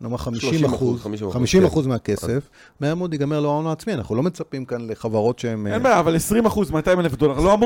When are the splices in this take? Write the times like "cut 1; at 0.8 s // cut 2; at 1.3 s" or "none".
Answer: none